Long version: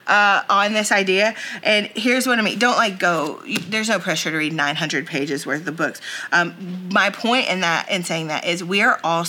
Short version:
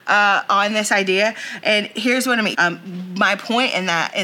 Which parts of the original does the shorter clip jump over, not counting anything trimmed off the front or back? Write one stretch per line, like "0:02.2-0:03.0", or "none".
0:02.5-0:06.3